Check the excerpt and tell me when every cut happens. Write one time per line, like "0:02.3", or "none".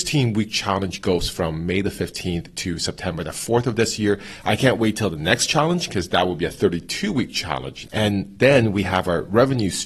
0:07.8

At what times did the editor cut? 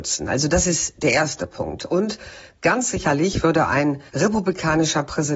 0:04.1

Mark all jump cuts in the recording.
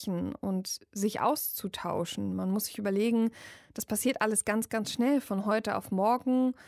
none

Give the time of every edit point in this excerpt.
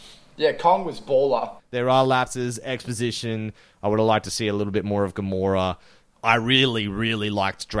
0:01.6

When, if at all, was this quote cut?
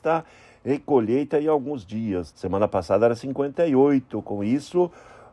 0:02.3

